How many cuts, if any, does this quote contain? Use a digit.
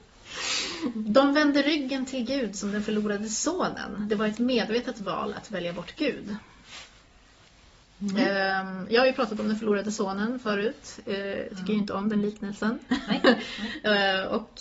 0